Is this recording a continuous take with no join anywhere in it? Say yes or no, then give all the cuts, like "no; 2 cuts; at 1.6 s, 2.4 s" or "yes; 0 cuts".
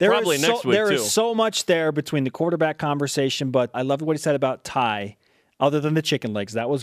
no; 1 cut; at 3.7 s